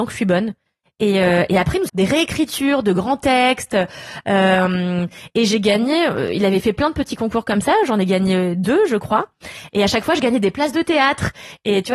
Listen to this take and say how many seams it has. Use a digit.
1